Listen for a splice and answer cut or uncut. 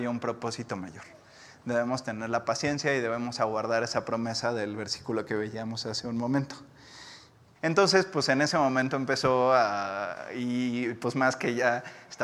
cut